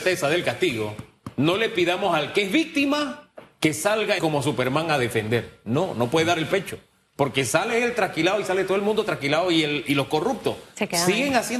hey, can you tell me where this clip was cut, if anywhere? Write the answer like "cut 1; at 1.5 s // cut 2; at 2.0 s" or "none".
cut 1; at 4.2 s